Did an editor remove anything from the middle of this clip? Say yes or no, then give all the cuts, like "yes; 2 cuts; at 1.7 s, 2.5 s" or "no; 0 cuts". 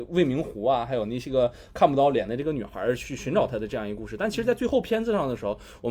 no; 0 cuts